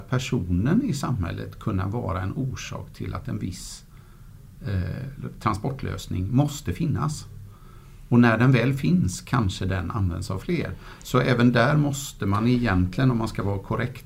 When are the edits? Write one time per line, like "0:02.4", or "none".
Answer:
none